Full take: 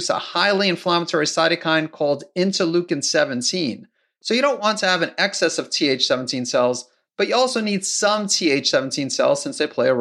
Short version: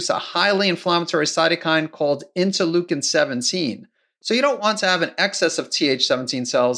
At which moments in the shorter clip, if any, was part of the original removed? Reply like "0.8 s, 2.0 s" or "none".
none